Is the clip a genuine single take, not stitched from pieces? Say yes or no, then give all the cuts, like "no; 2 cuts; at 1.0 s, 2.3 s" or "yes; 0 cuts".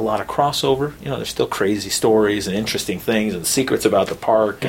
yes; 0 cuts